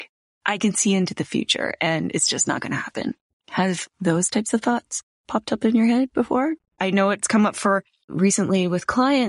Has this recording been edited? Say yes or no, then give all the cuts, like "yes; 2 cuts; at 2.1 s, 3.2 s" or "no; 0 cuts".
yes; 1 cut; at 6.8 s